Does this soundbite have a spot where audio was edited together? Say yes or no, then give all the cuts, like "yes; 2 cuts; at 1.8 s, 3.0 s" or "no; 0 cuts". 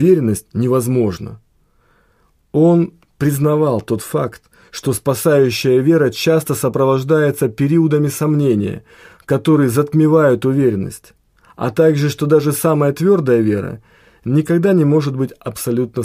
no; 0 cuts